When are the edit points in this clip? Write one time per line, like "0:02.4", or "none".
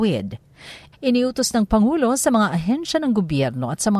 0:00.9